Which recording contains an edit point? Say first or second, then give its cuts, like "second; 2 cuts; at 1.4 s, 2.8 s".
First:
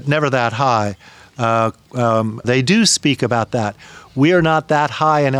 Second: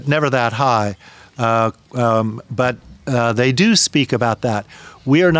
first; 1 cut; at 2.4 s